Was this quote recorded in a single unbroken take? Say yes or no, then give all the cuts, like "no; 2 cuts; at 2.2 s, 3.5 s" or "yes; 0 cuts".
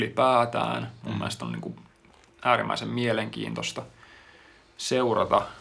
yes; 0 cuts